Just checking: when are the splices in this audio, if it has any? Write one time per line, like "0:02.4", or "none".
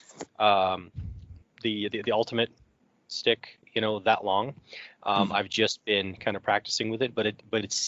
0:01.4